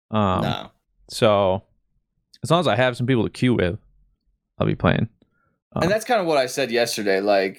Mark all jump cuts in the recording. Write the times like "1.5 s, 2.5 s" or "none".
none